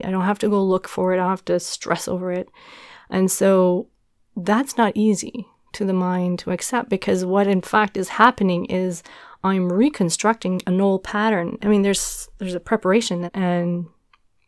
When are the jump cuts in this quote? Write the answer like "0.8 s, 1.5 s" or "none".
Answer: 11.6 s, 13.3 s